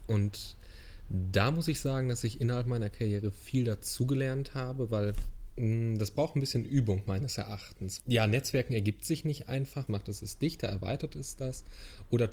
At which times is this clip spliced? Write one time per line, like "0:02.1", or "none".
0:08.0
0:09.9